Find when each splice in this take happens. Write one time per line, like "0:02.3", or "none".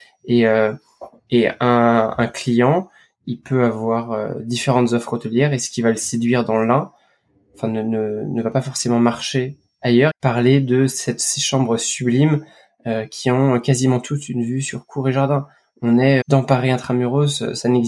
0:10.1
0:16.2